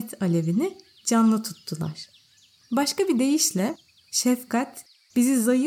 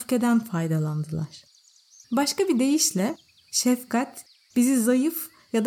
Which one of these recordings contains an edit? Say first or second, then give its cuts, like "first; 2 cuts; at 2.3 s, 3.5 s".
second; 1 cut; at 2.0 s